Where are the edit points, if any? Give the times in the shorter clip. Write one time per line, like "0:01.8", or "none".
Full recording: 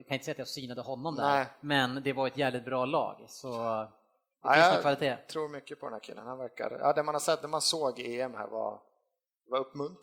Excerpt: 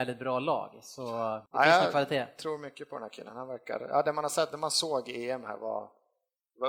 0:01.5